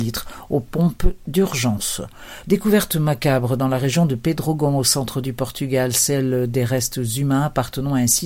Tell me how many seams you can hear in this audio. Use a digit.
1